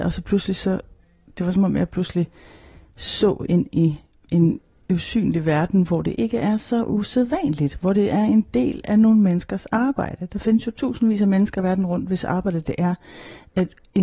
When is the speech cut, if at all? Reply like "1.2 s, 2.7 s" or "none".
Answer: none